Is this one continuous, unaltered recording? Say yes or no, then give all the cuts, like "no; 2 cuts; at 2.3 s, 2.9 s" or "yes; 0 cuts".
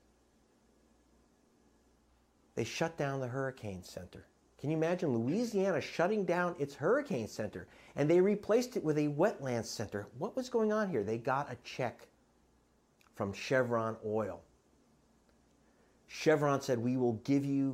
yes; 0 cuts